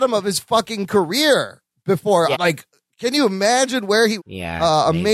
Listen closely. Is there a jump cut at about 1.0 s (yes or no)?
no